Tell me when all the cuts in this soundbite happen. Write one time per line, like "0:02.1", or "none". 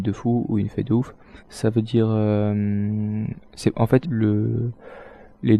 0:01.4
0:04.0